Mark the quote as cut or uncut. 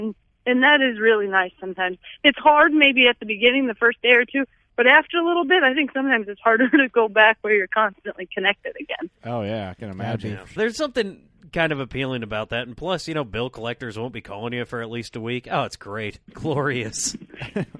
cut